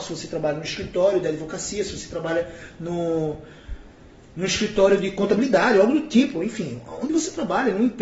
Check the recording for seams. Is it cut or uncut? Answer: uncut